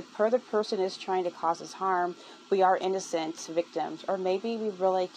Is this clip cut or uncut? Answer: uncut